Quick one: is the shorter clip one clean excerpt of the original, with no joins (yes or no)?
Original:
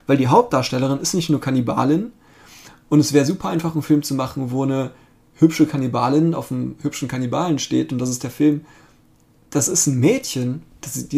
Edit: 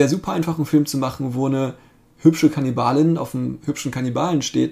yes